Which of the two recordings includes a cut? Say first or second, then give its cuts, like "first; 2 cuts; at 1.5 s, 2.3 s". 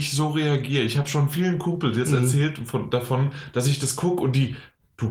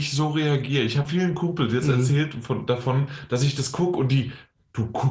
second; 1 cut; at 1.1 s